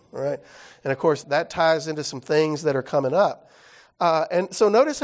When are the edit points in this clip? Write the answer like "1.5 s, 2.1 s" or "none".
1.2 s